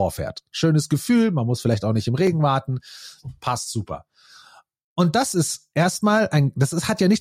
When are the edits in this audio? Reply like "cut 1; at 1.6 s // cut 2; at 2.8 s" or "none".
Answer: none